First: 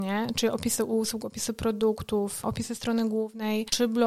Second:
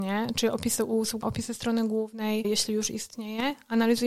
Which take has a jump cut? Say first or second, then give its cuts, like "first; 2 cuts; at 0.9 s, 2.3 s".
second; 2 cuts; at 1.2 s, 2.4 s